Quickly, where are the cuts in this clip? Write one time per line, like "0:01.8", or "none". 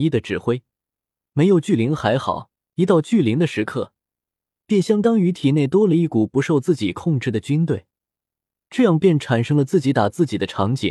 none